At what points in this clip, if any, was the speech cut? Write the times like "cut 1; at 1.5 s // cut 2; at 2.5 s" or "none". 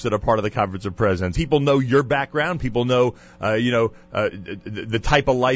cut 1; at 1.3 s